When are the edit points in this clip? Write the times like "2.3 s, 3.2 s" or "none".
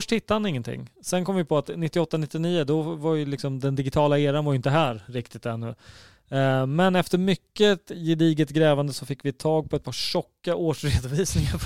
none